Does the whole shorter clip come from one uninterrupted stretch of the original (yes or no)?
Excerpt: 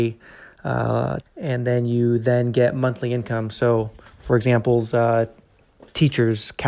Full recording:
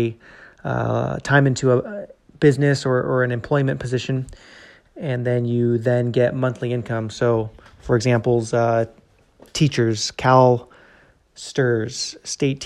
no